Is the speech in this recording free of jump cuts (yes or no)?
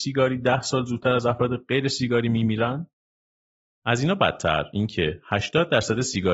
no